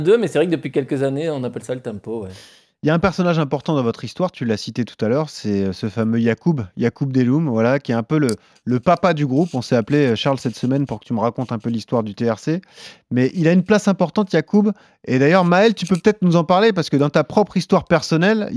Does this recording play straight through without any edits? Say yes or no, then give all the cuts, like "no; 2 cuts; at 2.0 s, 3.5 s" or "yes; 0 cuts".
yes; 0 cuts